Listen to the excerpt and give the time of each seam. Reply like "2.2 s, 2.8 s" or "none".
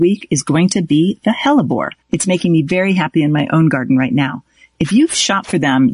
none